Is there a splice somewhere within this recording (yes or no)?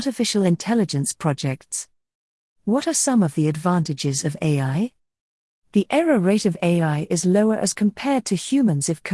no